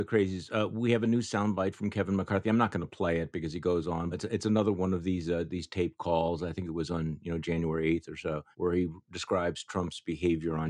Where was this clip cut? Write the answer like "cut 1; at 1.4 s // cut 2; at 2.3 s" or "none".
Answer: cut 1; at 4.1 s // cut 2; at 8.5 s